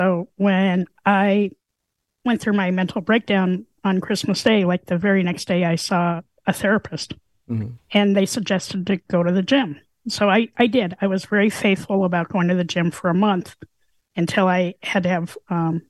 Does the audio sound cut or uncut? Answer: uncut